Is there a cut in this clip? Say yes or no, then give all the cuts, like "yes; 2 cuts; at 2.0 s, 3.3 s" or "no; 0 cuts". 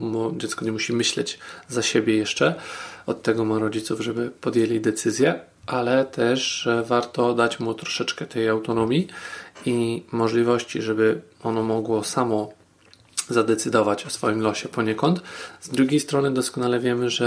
no; 0 cuts